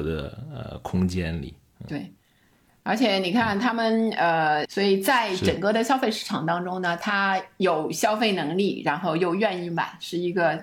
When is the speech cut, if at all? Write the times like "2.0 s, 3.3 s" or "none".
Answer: 4.7 s